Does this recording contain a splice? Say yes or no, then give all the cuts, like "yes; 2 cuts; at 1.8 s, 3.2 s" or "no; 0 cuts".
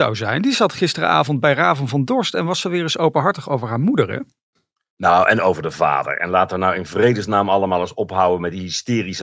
no; 0 cuts